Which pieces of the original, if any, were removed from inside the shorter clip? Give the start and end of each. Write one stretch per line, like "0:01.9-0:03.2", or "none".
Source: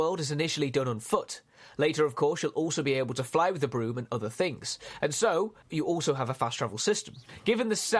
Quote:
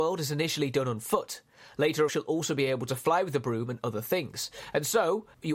0:02.1-0:02.4